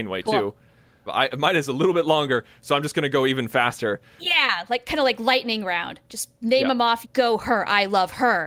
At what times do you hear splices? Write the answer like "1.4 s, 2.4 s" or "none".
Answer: 1.1 s, 4.2 s, 7.0 s

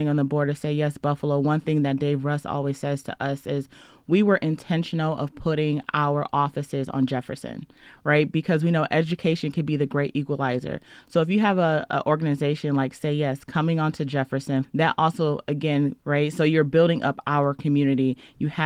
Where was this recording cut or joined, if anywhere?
14.6 s, 16.0 s

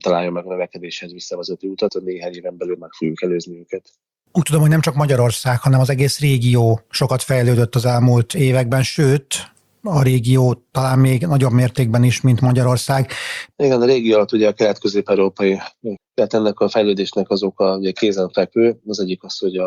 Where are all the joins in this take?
1.9 s, 13.5 s, 16.0 s

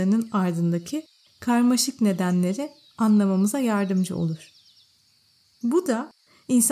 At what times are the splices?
none

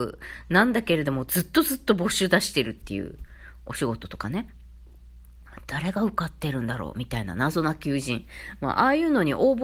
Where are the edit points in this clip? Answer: none

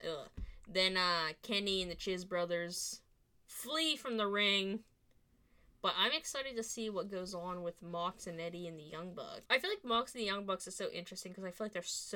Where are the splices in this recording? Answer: 9.5 s

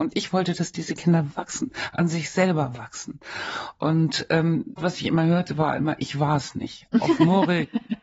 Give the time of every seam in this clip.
4.8 s

